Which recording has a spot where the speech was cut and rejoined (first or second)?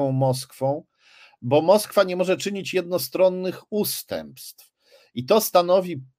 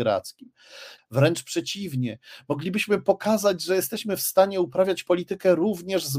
second